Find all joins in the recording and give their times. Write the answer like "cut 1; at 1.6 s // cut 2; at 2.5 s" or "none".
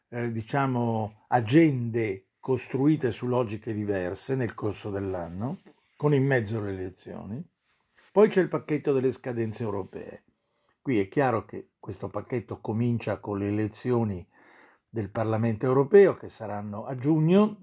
cut 1; at 8.1 s